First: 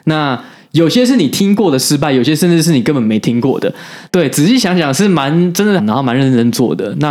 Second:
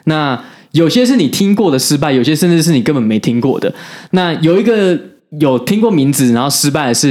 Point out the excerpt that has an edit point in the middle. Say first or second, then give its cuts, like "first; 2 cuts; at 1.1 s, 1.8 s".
first; 2 cuts; at 4.1 s, 5.8 s